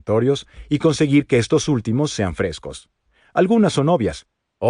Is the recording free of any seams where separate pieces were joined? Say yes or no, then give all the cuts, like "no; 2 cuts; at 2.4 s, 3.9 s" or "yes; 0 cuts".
no; 1 cut; at 3.2 s